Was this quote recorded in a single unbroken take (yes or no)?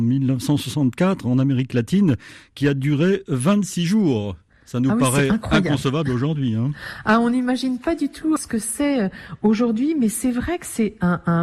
no